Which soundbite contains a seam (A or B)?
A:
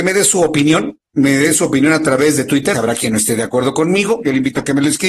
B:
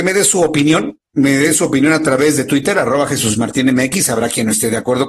A